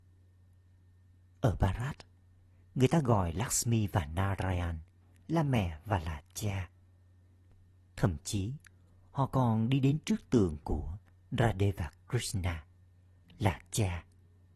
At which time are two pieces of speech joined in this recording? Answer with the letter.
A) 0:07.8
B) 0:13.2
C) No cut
B